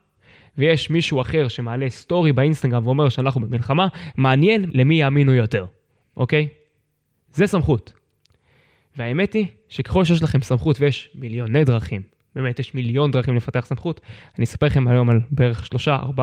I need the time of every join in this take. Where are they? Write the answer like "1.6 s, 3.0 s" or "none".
none